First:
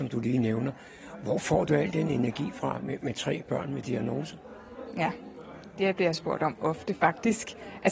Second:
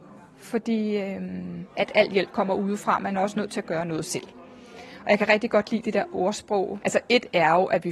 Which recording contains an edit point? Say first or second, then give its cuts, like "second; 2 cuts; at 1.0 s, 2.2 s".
second; 2 cuts; at 1.7 s, 6.8 s